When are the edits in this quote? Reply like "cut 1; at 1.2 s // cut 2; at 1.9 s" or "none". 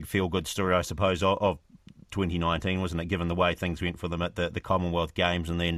none